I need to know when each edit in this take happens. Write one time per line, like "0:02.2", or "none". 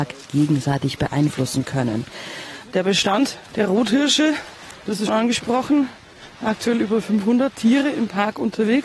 0:02.6
0:05.1